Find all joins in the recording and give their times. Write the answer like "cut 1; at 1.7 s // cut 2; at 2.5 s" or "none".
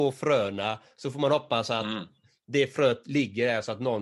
none